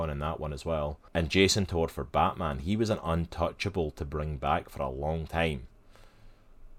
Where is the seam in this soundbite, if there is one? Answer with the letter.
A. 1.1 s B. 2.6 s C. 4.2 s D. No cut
A